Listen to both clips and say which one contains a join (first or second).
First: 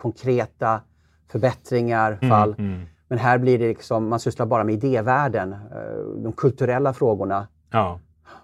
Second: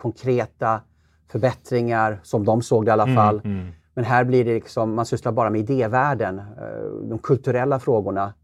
first